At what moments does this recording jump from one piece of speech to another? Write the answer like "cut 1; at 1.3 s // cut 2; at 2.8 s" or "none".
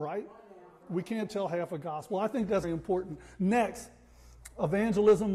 cut 1; at 2.6 s